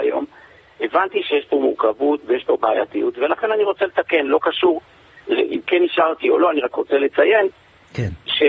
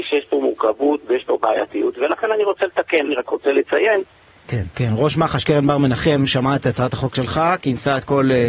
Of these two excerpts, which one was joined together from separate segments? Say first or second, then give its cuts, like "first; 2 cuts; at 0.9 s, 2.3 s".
second; 2 cuts; at 3.1 s, 4.7 s